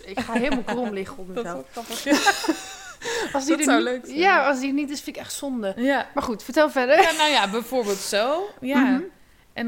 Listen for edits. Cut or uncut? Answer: uncut